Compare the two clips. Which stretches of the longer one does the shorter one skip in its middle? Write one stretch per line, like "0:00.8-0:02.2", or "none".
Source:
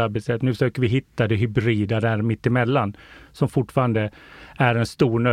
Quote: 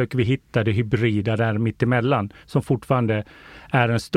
0:03.0-0:03.3